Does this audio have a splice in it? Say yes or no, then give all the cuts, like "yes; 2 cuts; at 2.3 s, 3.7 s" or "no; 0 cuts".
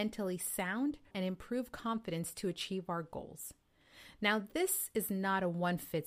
yes; 1 cut; at 1.1 s